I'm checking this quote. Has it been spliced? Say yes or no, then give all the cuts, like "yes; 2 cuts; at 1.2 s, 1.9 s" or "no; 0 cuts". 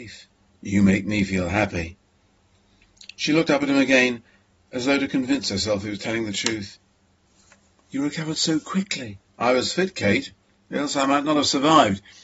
no; 0 cuts